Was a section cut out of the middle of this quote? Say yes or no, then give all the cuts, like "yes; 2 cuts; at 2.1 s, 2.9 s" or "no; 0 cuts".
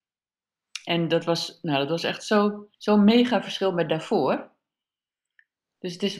yes; 1 cut; at 2.7 s